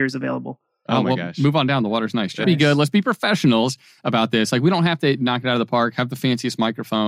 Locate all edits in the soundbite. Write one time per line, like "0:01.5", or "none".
0:02.4